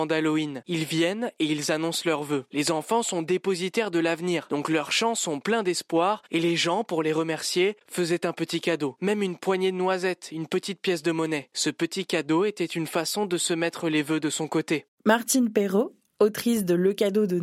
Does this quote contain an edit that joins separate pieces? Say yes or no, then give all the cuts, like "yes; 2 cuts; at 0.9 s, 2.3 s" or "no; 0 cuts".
yes; 1 cut; at 16.1 s